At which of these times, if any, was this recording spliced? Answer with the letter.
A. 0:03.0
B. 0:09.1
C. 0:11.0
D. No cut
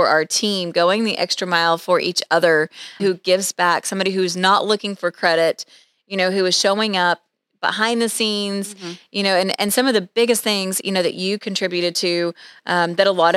A